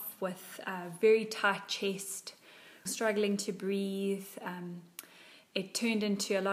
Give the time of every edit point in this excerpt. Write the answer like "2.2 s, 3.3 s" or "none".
2.9 s

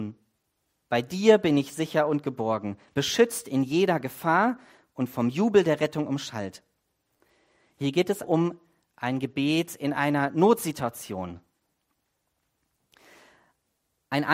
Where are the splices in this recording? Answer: 8.2 s

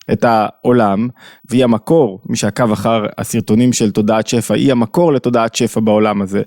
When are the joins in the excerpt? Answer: 1.4 s

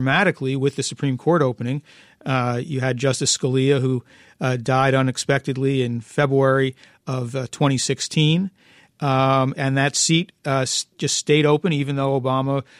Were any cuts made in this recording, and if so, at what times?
9.6 s

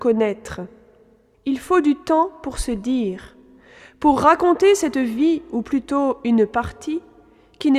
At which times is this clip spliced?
1.3 s

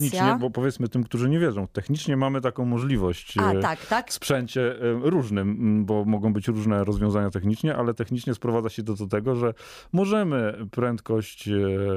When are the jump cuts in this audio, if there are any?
none

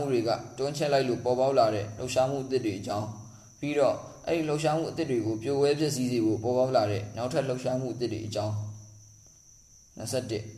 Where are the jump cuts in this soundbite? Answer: none

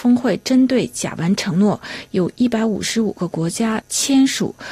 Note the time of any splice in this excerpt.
none

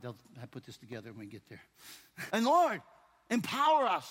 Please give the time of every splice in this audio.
2.3 s

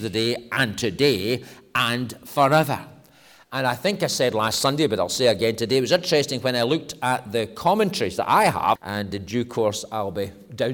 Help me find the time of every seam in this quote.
8.8 s

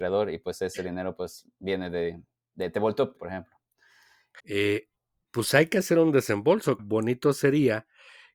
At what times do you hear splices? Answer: 3.2 s, 4.4 s, 6.8 s

